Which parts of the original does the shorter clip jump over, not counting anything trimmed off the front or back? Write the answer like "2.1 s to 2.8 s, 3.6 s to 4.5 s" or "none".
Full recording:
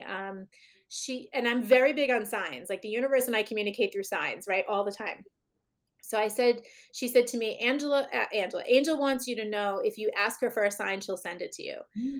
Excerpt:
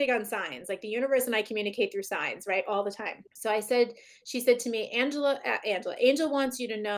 5.3 s to 5.9 s